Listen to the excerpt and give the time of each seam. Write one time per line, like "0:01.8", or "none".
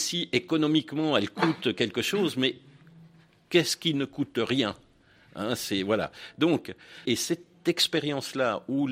0:07.1